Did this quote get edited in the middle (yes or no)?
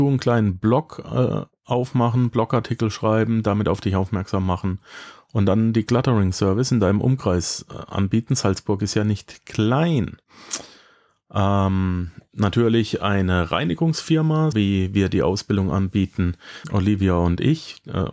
yes